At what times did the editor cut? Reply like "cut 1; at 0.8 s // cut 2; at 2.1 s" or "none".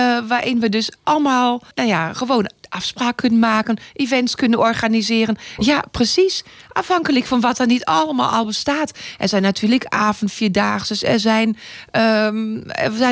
cut 1; at 1.7 s // cut 2; at 5.6 s